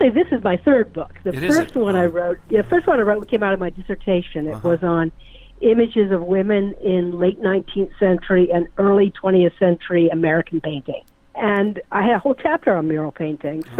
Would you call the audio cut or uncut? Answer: uncut